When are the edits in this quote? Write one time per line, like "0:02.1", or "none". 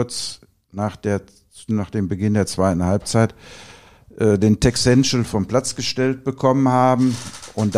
none